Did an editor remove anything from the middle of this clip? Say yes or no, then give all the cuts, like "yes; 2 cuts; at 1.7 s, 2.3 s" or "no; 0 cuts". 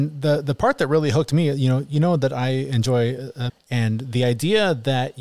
yes; 1 cut; at 3.5 s